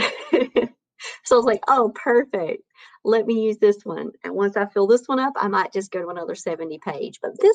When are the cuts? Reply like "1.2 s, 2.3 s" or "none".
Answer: none